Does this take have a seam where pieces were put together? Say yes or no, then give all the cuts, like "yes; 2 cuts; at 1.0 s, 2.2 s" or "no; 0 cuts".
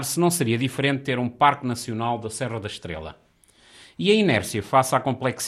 no; 0 cuts